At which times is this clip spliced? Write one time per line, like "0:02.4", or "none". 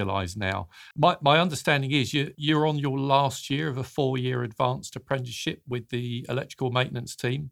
0:00.9
0:02.3